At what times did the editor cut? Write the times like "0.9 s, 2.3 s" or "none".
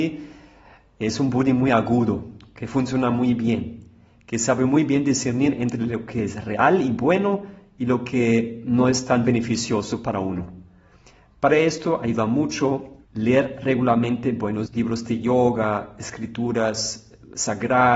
13.0 s, 14.7 s